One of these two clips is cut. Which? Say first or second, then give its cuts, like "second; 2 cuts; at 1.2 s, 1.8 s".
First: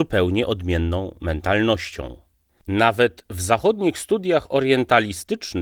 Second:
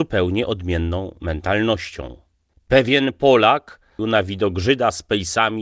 second; 2 cuts; at 2.5 s, 4.0 s